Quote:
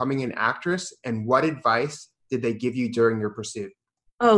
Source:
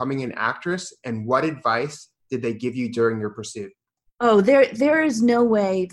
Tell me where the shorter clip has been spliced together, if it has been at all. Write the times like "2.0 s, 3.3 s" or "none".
none